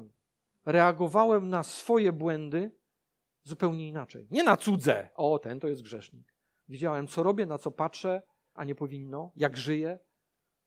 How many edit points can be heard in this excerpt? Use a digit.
2